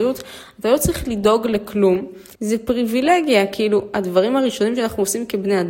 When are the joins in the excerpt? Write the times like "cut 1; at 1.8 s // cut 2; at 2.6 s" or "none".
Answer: cut 1; at 2.4 s